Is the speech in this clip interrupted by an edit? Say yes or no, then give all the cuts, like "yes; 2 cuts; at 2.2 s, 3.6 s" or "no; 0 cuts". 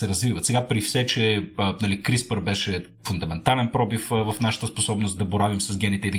yes; 1 cut; at 5.2 s